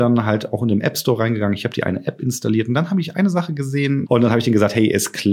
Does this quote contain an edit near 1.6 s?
no; 1 cut; at 4.1 s

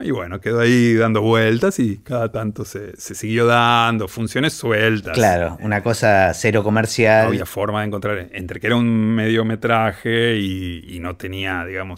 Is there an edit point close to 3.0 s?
yes; 1 cut; at 3.0 s

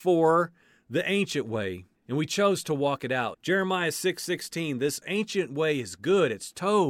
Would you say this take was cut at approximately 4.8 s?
no; 2 cuts; at 2.0 s, 3.3 s

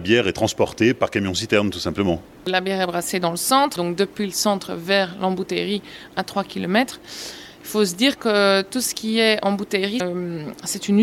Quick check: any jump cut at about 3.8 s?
yes; 2 cuts; at 3.8 s, 10.0 s

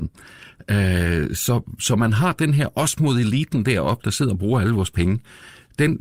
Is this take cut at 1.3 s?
no; 0 cuts

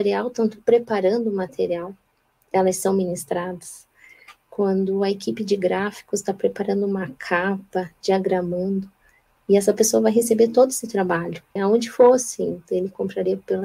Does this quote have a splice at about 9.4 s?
yes; 2 cuts; at 9.4 s, 11.6 s

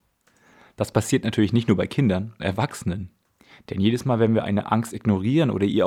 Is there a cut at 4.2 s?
no; 1 cut; at 2.4 s

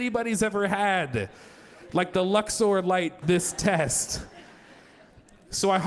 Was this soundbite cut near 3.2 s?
yes; 1 cut; at 3.2 s

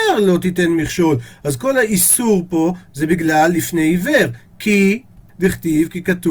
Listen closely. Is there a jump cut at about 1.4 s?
no; 1 cut; at 5.3 s

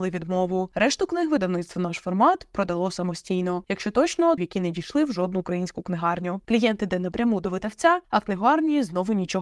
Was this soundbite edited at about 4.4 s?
yes; 2 cuts; at 4.4 s, 6.4 s

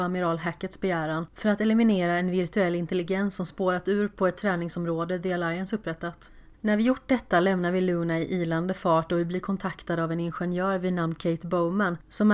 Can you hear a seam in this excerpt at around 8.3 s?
no; 1 cut; at 6.5 s

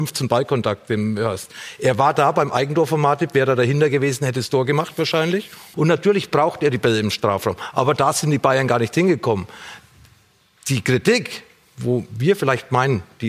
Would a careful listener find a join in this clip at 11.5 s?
no; 1 cut; at 5.7 s

